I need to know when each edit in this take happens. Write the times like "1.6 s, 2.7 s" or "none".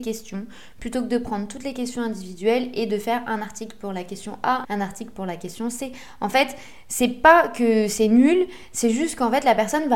4.6 s